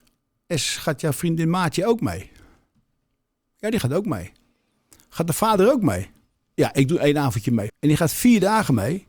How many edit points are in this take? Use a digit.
2